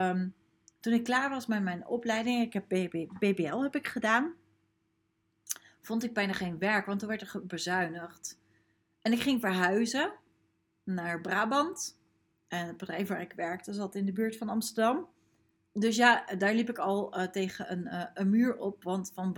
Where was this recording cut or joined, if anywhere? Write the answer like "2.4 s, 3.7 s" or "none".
15.7 s